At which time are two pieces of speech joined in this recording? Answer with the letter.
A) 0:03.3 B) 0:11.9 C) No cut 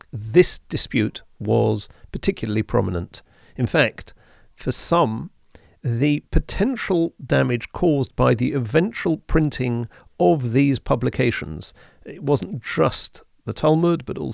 C